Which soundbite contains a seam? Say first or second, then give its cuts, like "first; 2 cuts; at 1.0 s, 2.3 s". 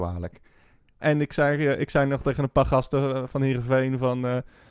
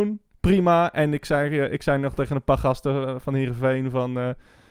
first; 1 cut; at 1.0 s